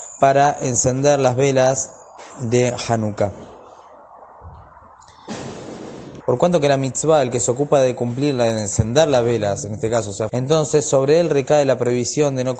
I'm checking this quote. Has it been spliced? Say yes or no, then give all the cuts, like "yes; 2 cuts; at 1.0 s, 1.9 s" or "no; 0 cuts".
yes; 3 cuts; at 2.3 s, 6.2 s, 10.3 s